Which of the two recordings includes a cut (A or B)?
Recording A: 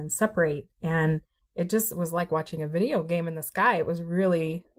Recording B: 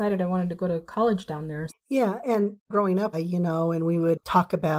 B